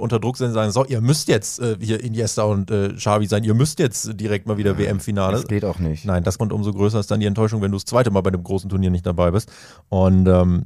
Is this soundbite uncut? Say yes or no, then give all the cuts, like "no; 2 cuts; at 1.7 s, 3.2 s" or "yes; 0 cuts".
no; 1 cut; at 6.4 s